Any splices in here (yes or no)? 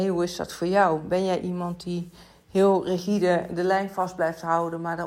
no